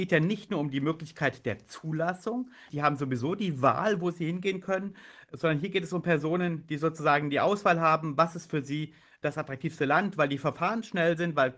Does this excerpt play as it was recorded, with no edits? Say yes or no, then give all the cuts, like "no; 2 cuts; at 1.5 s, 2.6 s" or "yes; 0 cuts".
no; 1 cut; at 2.7 s